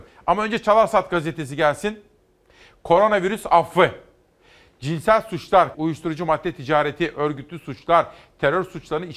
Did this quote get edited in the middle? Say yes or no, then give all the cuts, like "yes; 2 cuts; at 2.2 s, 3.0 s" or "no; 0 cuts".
yes; 1 cut; at 5.7 s